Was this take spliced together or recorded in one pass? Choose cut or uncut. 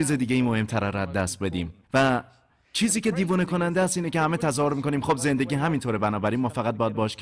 cut